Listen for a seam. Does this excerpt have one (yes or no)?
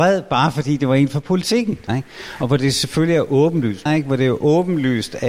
yes